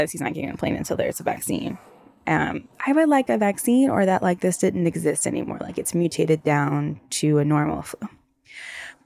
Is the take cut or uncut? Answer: cut